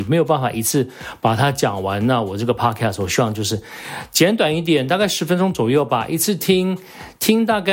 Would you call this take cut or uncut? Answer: uncut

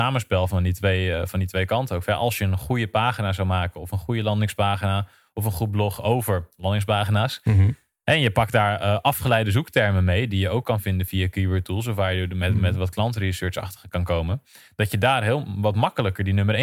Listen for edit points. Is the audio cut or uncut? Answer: uncut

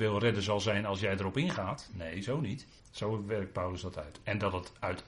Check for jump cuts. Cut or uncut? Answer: cut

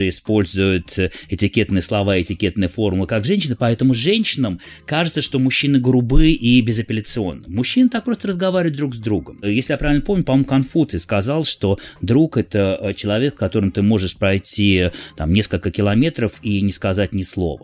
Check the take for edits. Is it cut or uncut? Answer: uncut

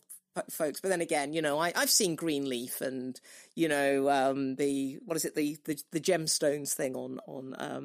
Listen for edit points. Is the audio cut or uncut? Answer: uncut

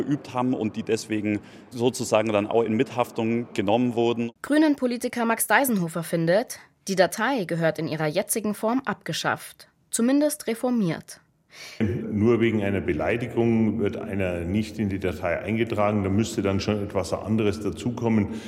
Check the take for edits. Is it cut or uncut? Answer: cut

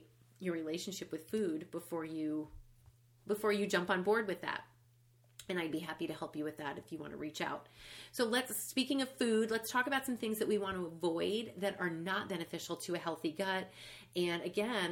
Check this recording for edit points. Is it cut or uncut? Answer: uncut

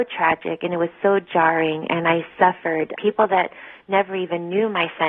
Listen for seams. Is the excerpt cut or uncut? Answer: cut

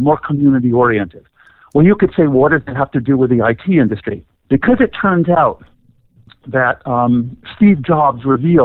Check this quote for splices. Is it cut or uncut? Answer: cut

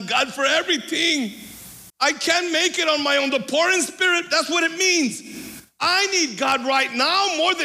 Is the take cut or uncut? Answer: cut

